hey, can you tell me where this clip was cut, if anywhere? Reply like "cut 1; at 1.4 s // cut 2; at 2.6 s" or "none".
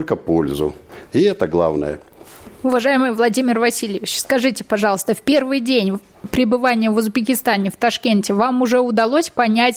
cut 1; at 1.1 s